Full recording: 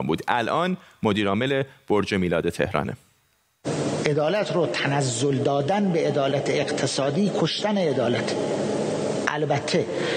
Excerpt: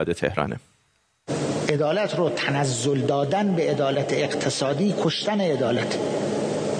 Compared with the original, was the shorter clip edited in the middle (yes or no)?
no